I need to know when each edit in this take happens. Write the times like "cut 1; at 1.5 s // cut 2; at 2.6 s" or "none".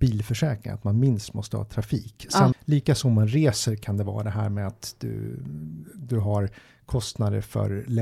cut 1; at 2.5 s